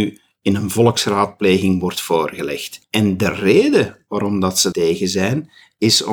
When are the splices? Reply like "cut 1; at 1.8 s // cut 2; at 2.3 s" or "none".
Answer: cut 1; at 2.8 s // cut 2; at 4.7 s

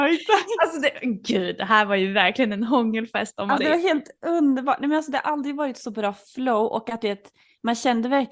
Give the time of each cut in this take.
cut 1; at 3.6 s

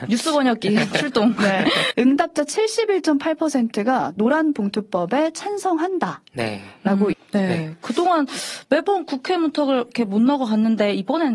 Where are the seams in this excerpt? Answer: cut 1; at 1.9 s // cut 2; at 7.1 s

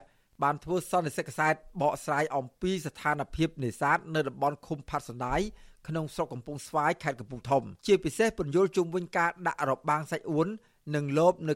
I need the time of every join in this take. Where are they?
cut 1; at 7.8 s

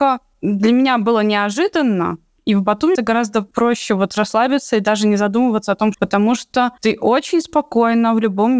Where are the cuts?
cut 1; at 3.0 s // cut 2; at 5.9 s

